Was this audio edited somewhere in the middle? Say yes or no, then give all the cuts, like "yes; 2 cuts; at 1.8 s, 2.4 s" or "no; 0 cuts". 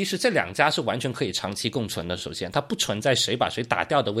no; 0 cuts